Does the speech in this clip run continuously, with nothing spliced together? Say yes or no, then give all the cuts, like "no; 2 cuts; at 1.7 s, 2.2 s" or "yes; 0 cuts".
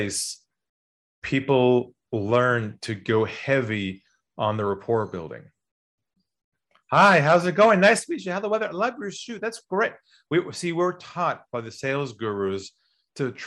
yes; 0 cuts